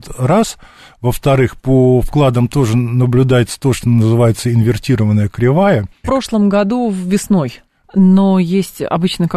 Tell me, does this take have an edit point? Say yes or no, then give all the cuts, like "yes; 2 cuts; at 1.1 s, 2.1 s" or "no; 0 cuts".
yes; 2 cuts; at 6.0 s, 7.8 s